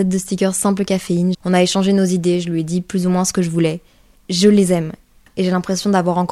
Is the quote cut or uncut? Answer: cut